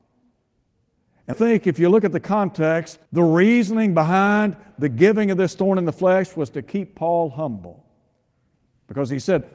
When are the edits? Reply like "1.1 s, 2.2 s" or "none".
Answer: 1.3 s, 3.1 s